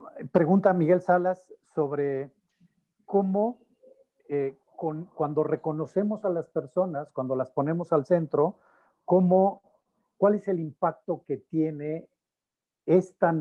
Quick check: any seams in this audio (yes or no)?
no